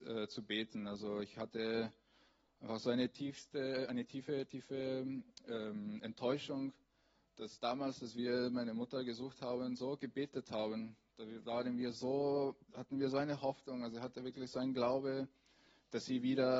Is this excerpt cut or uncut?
uncut